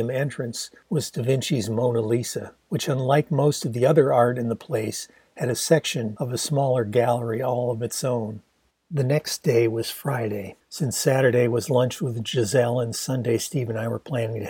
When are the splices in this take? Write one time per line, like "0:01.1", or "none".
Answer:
0:08.7
0:10.6